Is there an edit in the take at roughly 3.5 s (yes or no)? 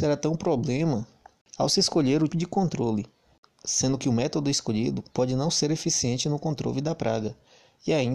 no